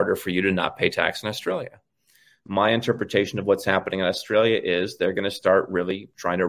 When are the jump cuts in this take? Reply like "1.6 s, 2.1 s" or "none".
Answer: 2.5 s

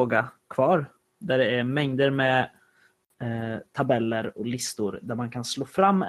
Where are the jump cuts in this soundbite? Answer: 1.0 s

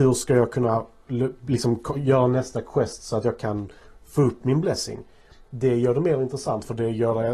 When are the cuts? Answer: none

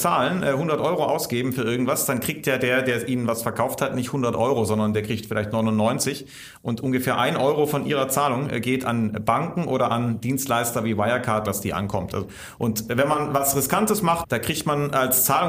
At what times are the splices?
11.5 s, 14.2 s

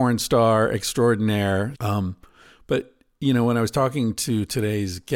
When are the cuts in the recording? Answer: 1.7 s

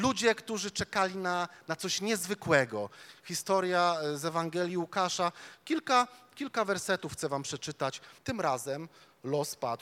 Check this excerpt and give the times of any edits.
8.2 s

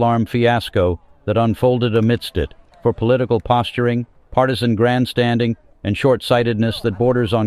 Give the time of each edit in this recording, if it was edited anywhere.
2.7 s

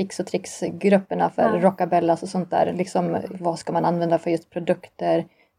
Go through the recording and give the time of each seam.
none

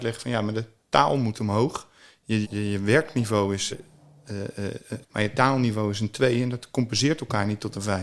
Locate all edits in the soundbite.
2.4 s, 3.7 s, 5.0 s

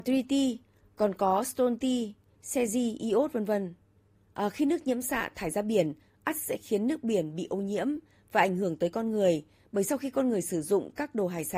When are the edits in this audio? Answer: none

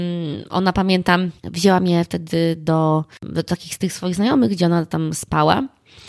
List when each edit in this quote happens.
1.4 s

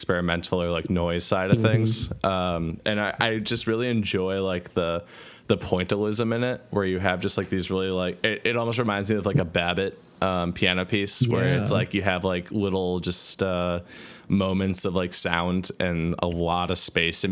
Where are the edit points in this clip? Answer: none

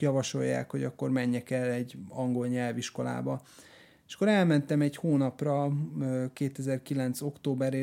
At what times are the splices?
none

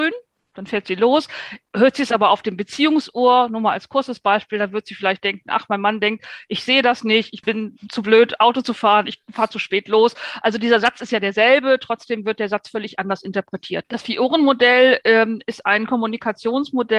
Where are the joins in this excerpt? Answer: 1.6 s, 7.4 s, 13.8 s

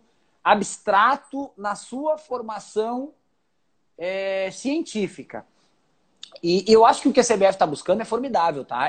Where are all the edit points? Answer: none

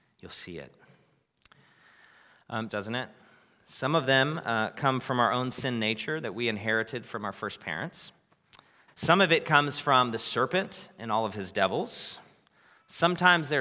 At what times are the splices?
2.7 s, 8.9 s

